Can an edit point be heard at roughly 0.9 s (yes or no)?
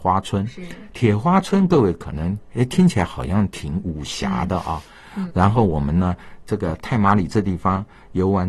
no